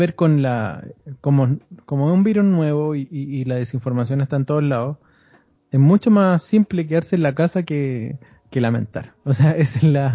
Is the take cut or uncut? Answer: uncut